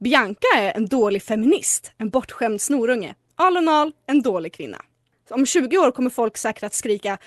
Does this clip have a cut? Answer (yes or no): yes